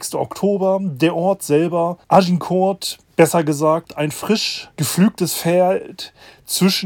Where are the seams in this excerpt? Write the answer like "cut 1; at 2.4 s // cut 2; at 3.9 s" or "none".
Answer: cut 1; at 2.0 s // cut 2; at 4.7 s